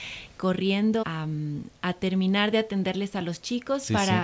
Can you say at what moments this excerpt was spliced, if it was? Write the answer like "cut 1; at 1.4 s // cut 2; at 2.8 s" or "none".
cut 1; at 1.0 s